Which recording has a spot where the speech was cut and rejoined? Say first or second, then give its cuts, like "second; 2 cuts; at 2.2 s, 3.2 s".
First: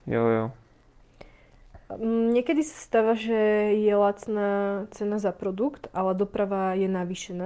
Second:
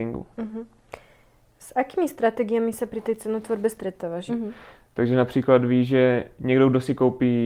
second; 1 cut; at 4.3 s